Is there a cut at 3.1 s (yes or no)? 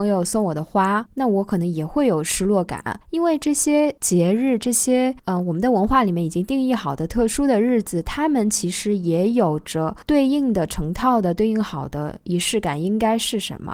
no